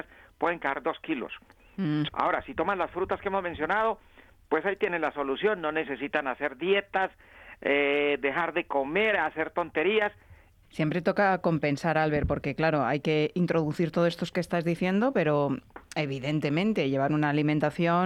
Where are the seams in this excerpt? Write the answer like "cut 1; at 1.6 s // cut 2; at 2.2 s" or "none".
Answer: cut 1; at 2.1 s // cut 2; at 10.6 s